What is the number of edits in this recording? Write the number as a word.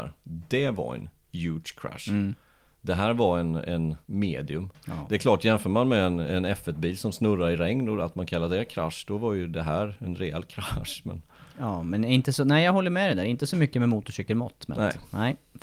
one